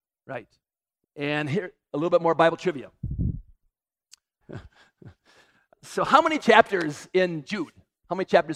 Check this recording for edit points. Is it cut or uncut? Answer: cut